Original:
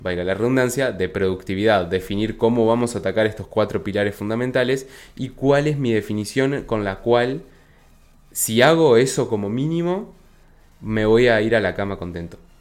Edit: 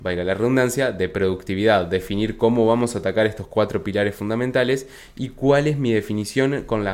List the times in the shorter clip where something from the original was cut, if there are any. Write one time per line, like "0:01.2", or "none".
none

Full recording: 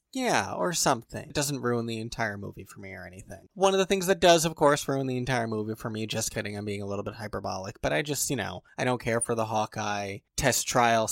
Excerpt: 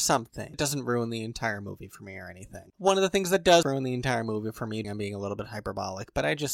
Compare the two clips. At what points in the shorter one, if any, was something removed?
0:03.6
0:04.8

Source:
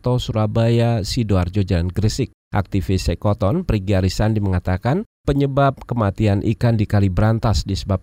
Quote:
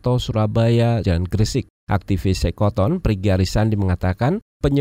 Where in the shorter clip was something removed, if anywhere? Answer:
0:01.0

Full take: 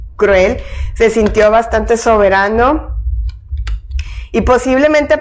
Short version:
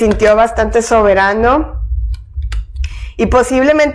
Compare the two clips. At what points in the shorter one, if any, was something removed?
none

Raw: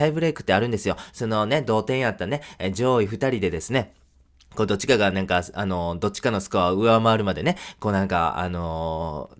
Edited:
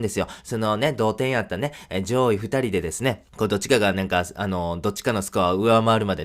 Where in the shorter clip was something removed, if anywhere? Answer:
0:03.3

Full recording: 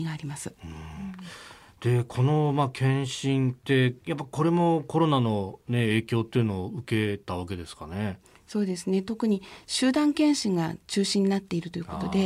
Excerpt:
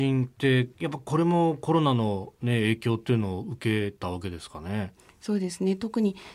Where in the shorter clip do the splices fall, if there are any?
none

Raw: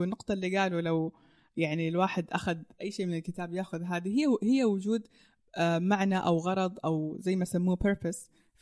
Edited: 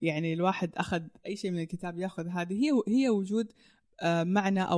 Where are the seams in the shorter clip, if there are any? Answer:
none

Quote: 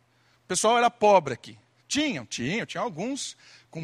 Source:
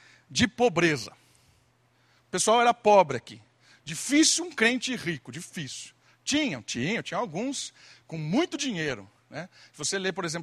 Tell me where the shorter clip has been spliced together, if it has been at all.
0:01.8

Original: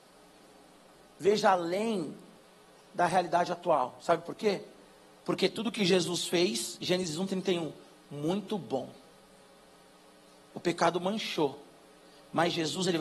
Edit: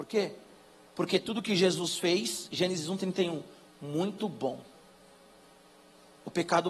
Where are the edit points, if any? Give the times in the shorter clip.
none

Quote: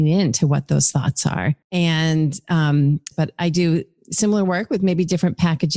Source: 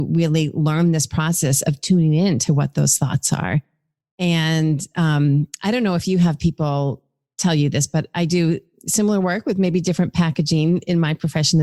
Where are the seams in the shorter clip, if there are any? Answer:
0:01.6
0:03.1

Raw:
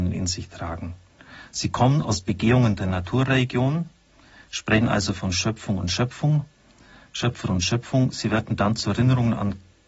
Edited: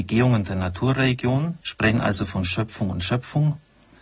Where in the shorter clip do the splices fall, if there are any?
0:01.6

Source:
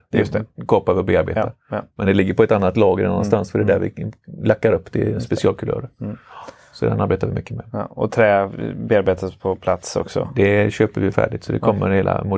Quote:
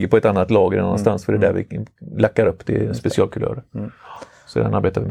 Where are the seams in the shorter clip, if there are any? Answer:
none

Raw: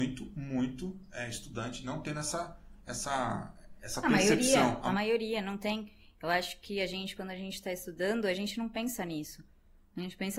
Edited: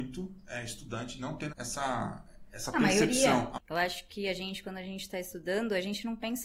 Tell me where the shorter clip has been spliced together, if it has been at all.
0:01.5
0:03.5

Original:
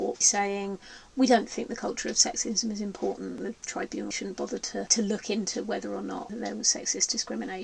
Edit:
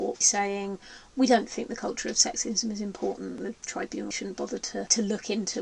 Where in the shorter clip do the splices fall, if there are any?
none

